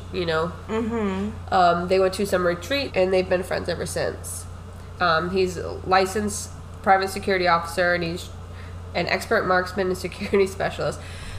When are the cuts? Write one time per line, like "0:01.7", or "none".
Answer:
0:02.9
0:05.0